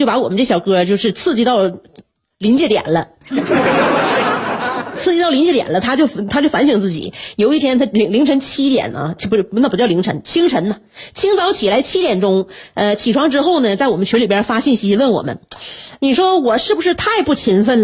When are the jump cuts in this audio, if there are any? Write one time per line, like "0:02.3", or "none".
none